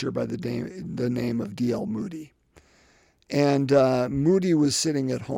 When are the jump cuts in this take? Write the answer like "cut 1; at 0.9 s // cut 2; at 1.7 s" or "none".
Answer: none